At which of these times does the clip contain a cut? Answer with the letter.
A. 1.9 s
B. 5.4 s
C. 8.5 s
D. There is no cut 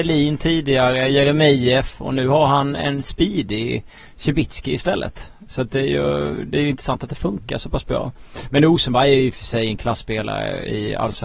D